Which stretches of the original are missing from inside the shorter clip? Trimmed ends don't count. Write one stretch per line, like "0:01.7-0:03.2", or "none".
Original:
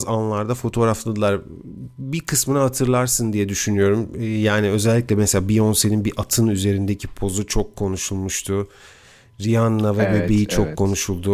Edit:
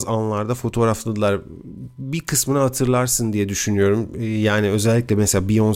none